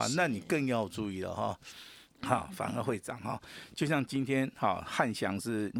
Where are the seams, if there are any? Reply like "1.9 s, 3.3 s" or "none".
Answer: 2.1 s